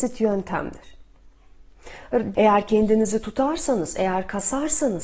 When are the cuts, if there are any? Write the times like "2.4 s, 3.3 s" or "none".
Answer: 2.3 s